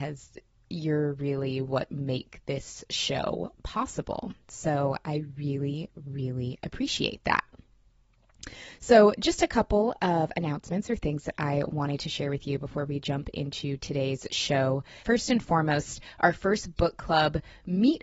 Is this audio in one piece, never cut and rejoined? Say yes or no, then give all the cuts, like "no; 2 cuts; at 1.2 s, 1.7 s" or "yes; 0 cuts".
no; 1 cut; at 15.0 s